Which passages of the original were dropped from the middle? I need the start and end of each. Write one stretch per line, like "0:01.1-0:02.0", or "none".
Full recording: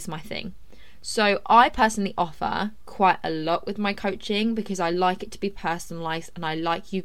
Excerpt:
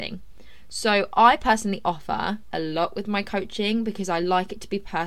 0:02.8-0:03.2

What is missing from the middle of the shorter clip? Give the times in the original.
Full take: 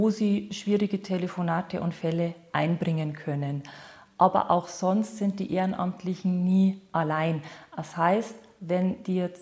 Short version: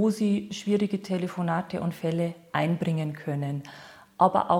none

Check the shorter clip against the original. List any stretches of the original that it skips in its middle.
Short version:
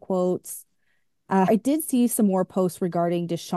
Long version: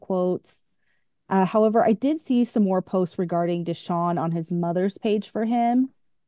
0:01.5-0:01.8

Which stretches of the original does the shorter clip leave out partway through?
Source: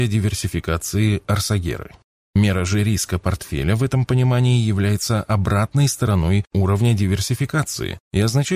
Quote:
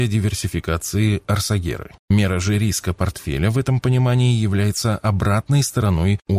0:02.0-0:02.2

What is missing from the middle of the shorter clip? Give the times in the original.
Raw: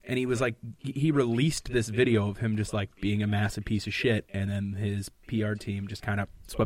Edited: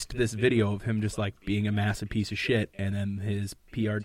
none

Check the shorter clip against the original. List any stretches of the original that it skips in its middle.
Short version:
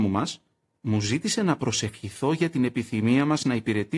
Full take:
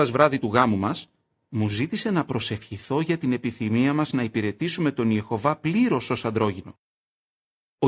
none

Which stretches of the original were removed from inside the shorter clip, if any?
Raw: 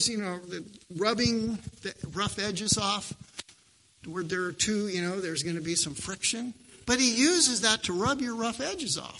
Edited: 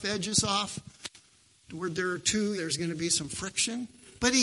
0:04.9-0:05.2

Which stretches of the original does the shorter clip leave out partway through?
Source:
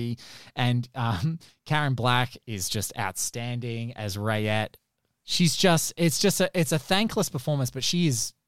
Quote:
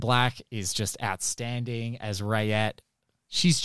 none

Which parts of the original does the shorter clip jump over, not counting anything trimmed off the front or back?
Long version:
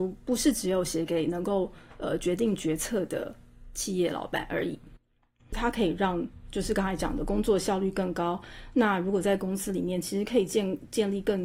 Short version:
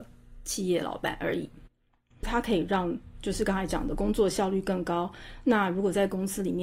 none

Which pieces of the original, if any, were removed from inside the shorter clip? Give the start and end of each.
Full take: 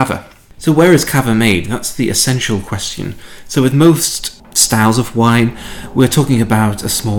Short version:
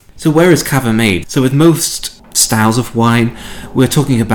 0:01.7-0:03.4

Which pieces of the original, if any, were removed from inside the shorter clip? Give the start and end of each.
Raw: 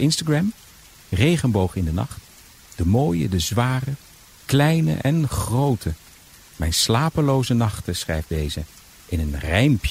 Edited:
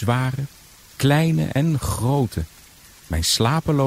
none

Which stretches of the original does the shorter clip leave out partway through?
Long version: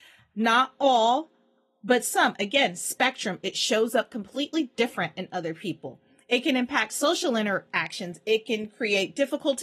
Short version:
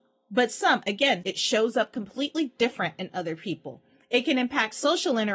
0:02.7-0:03.4

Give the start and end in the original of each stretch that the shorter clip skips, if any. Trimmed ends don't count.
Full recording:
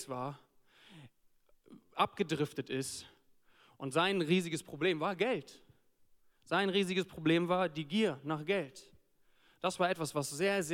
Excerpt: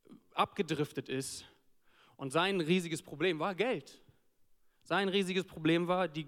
none

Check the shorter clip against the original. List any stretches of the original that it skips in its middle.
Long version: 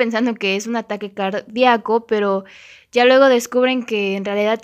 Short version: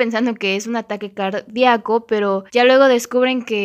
0:02.5-0:02.9

